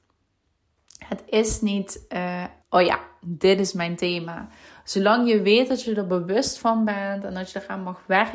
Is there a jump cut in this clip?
yes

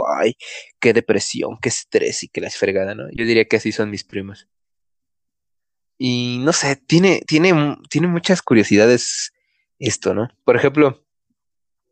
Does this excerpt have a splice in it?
yes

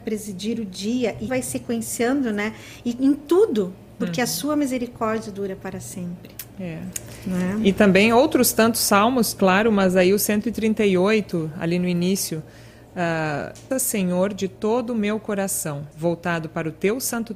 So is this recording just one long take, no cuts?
no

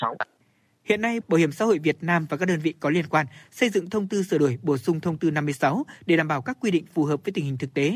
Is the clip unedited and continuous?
no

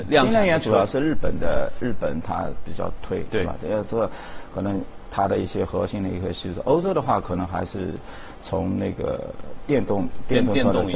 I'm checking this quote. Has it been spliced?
no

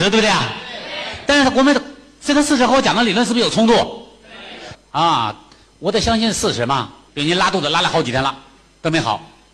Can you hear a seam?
yes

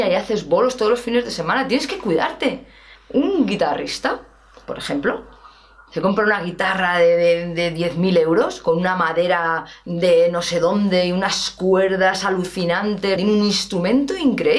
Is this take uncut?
no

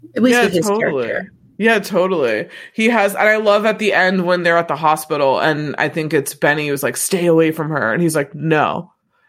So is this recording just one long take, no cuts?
yes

